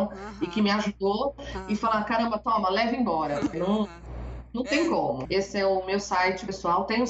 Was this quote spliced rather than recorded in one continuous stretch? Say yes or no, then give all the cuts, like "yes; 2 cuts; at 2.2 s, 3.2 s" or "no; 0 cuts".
yes; 2 cuts; at 3.5 s, 5.3 s